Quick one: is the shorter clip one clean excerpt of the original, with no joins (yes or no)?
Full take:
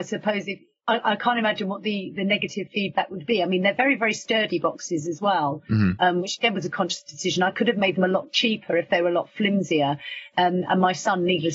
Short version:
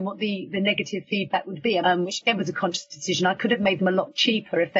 no